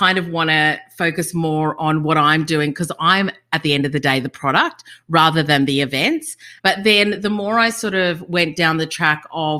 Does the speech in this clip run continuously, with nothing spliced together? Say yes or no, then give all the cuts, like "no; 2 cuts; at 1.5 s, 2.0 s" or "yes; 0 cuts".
no; 1 cut; at 6.6 s